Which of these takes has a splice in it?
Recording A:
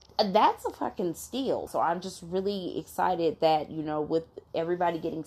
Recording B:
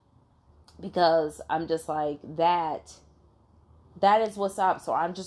A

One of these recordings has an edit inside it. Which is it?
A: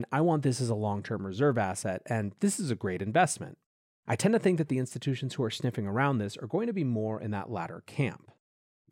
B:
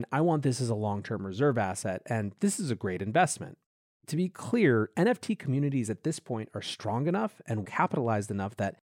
B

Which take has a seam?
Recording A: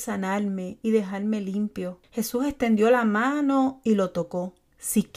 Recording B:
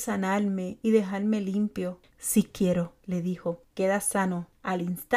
B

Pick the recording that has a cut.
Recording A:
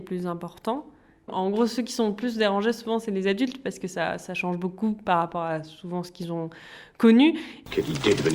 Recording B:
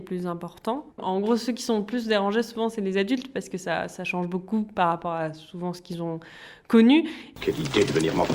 B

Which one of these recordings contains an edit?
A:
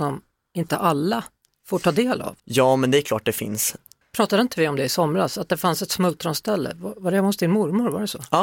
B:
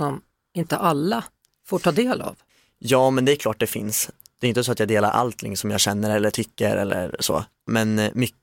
A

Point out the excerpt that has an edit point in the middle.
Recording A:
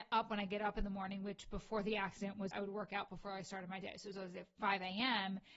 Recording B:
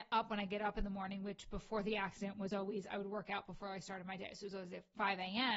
A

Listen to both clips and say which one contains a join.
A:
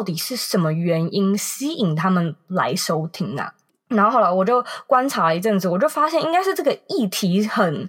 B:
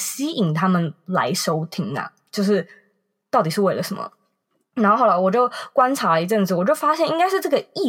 A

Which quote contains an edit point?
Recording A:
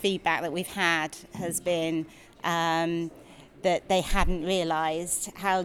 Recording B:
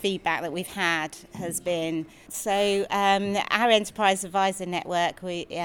B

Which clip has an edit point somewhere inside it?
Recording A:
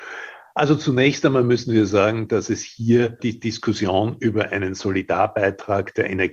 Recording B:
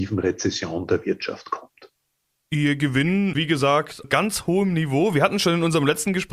B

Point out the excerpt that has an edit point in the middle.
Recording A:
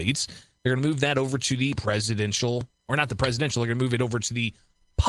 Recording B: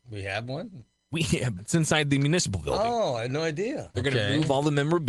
B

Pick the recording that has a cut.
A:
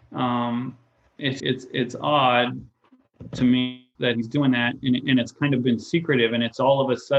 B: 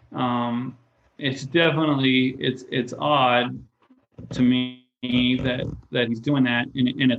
A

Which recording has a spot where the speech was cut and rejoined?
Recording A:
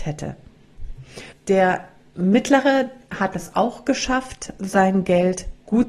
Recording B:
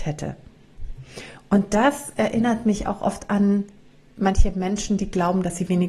A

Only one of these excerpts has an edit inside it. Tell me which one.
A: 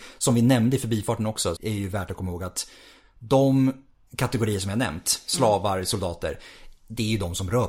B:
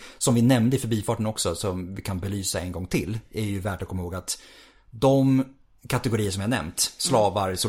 A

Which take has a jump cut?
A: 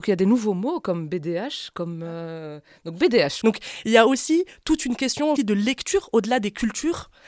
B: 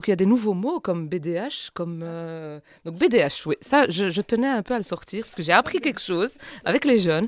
A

